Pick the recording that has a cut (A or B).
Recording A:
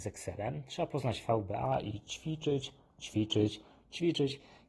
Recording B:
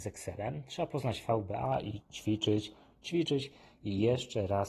B